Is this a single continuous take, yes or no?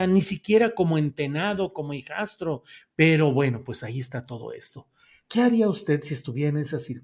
no